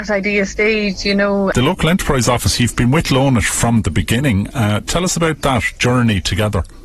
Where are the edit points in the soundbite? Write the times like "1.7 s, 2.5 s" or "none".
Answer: 1.5 s